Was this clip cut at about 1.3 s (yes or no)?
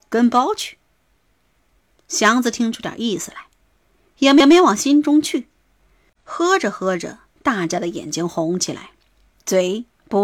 no